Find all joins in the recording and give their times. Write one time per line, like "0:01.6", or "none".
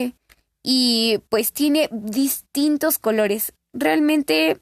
none